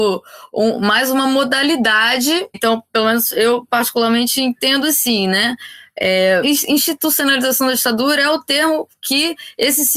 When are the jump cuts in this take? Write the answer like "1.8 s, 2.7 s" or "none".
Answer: 2.5 s, 6.4 s